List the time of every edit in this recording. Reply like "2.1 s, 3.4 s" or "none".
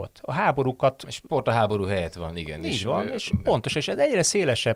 3.4 s

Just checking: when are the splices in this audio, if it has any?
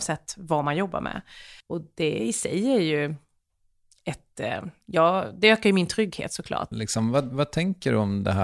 1.6 s, 6.7 s

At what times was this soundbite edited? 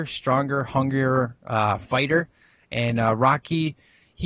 none

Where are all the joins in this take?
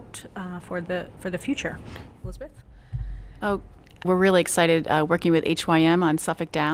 4.0 s

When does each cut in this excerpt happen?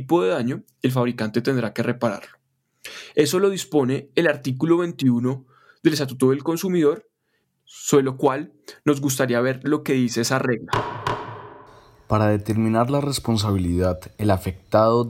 none

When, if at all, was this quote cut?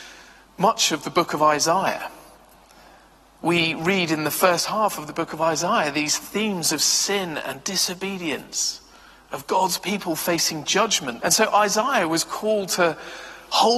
11.2 s

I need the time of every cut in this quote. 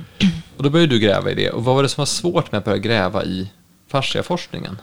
none

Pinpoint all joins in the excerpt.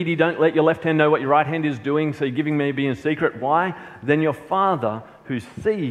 3.4 s

